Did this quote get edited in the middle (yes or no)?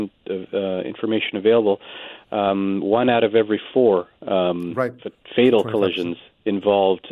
no